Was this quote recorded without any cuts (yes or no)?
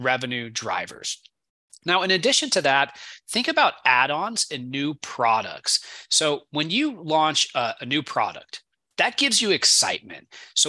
yes